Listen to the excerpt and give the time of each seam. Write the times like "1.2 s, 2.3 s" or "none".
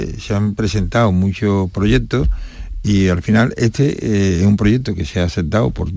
none